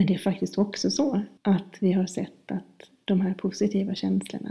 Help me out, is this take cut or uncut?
cut